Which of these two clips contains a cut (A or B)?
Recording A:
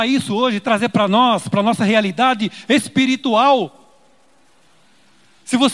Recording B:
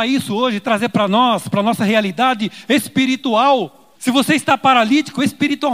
B